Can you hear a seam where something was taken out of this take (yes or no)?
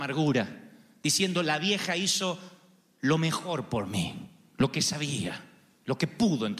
no